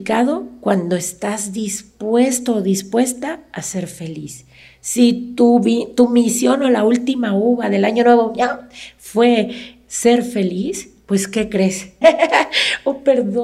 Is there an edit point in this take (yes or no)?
yes